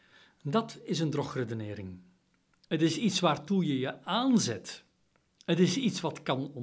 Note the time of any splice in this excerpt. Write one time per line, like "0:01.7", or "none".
0:02.6

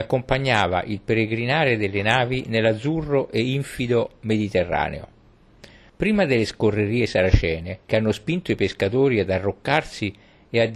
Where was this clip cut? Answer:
0:05.9
0:07.8

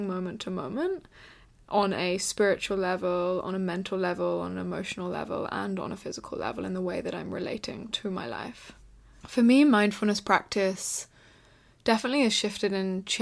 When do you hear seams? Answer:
0:09.2

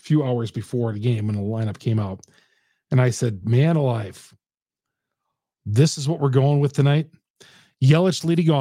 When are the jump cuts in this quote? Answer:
none

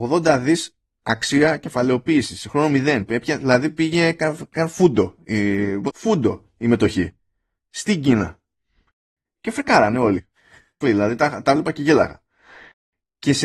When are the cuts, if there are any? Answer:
0:05.9
0:10.8

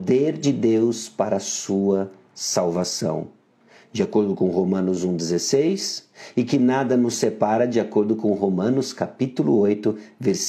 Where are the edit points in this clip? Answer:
none

